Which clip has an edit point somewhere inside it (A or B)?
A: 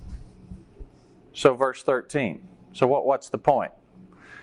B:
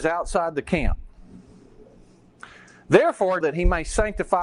B